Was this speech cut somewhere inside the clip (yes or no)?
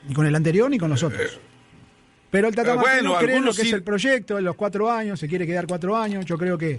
no